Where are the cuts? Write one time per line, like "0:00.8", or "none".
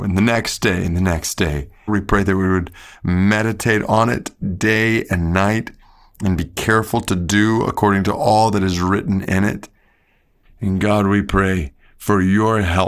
0:01.9
0:10.4